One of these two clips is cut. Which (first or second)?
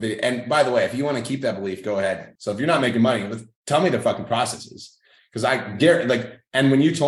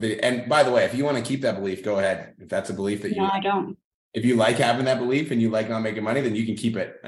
first